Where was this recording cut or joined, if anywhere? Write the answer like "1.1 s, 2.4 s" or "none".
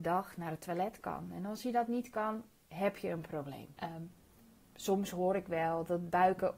3.8 s